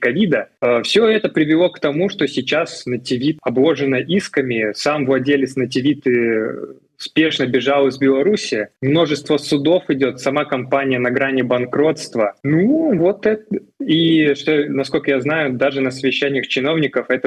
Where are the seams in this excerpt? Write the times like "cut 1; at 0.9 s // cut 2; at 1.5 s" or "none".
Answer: none